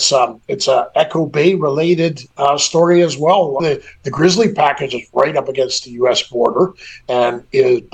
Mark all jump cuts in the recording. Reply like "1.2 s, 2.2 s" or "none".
3.6 s